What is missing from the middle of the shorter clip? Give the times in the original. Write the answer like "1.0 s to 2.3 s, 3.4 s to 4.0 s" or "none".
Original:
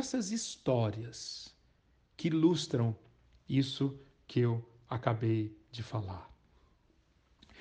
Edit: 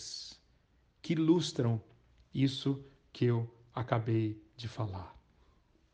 none